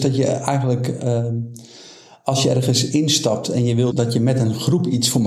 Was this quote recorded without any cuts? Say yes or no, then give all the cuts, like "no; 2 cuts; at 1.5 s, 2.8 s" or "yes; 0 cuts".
no; 1 cut; at 3.9 s